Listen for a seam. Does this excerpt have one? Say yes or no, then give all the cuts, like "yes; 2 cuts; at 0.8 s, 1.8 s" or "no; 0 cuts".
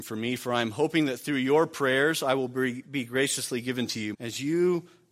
yes; 1 cut; at 4.1 s